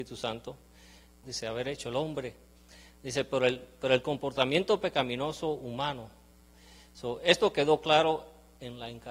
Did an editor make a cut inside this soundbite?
yes; 1 cut; at 1.2 s

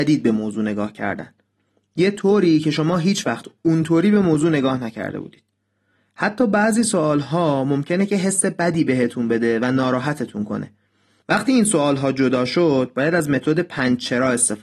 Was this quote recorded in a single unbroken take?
no; 1 cut; at 11.2 s

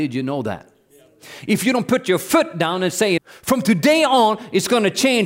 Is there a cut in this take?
yes; 1 cut; at 3.2 s

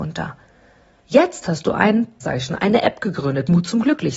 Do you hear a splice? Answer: yes; 2 cuts; at 1.0 s, 2.2 s

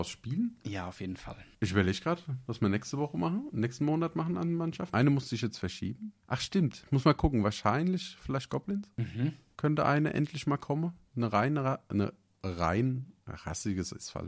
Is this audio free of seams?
yes; 0 cuts

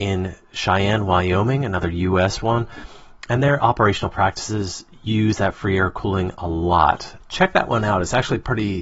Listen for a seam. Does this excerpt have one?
yes; 1 cut; at 7.2 s

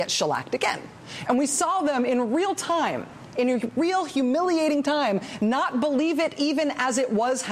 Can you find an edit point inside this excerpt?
yes; 1 cut; at 1.2 s

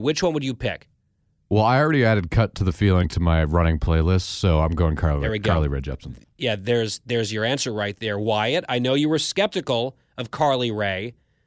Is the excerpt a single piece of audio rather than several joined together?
yes; 0 cuts

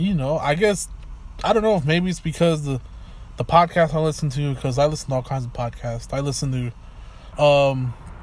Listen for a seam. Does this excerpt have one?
yes; 1 cut; at 7.3 s

